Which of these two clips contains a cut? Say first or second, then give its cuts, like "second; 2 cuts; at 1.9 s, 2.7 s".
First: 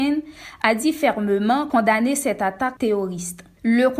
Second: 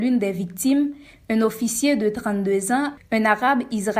second; 1 cut; at 3.0 s